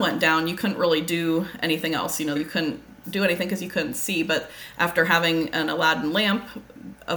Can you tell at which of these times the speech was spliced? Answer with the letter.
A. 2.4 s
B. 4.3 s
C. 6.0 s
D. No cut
A